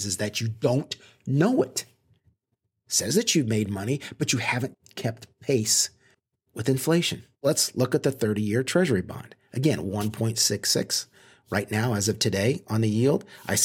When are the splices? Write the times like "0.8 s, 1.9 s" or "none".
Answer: none